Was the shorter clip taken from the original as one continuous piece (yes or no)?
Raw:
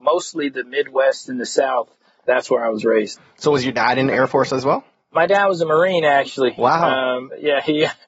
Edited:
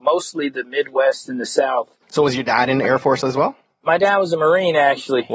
no